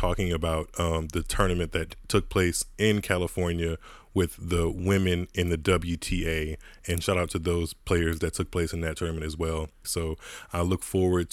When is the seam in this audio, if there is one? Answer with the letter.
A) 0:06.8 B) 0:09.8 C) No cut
B